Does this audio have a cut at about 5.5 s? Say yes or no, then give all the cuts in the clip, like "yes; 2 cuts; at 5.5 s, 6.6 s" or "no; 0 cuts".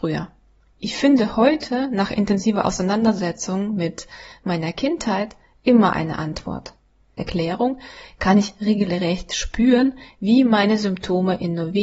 no; 1 cut; at 7.2 s